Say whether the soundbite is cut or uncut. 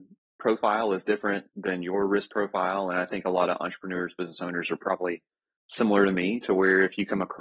uncut